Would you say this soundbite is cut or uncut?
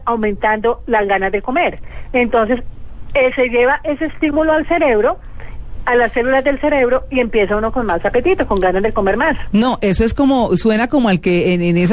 uncut